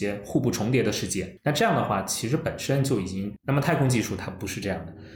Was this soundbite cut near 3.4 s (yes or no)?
yes